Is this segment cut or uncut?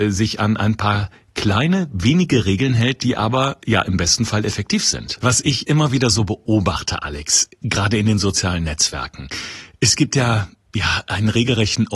cut